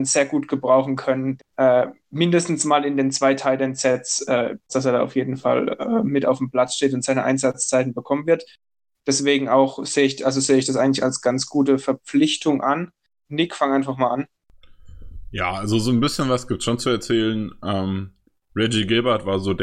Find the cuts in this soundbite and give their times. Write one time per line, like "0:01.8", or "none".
0:01.4
0:04.7
0:13.2